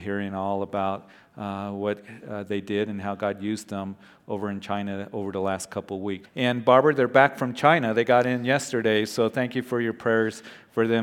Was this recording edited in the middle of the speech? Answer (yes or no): yes